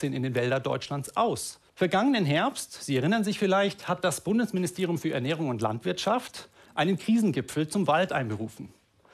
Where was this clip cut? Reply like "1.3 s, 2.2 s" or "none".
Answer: 1.7 s